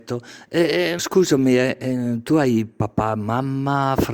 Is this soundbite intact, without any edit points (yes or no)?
no